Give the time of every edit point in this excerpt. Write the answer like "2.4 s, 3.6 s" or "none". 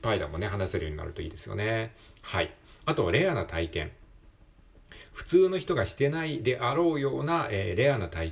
none